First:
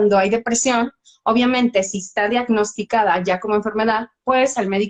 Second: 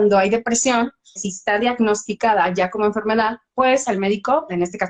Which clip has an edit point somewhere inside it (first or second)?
second